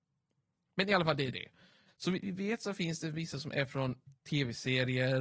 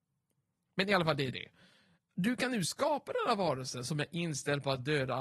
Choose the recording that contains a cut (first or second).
first